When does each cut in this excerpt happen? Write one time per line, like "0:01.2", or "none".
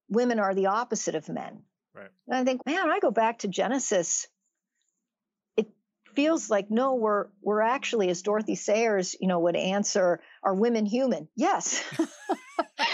0:02.6